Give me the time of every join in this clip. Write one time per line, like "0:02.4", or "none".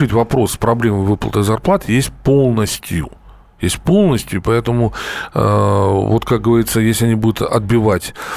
none